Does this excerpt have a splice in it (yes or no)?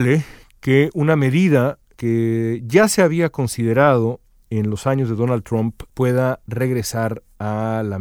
no